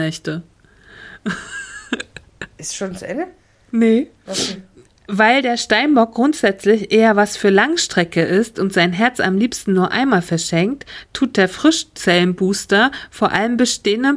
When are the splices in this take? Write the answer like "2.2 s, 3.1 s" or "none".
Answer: 2.6 s